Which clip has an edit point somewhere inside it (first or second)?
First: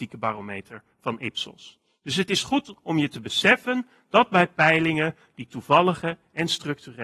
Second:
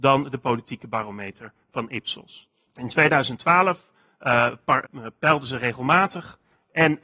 second